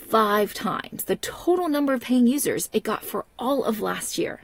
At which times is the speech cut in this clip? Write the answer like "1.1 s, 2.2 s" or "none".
none

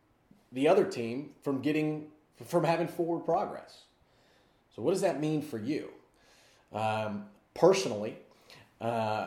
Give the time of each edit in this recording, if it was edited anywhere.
none

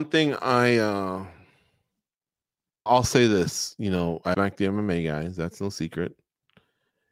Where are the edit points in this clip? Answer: 2.9 s, 4.3 s

